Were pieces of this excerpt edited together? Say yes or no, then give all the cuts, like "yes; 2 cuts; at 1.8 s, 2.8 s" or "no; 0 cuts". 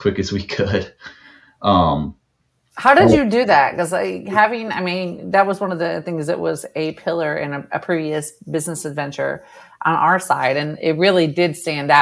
no; 0 cuts